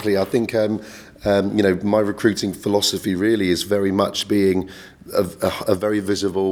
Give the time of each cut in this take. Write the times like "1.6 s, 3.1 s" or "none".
none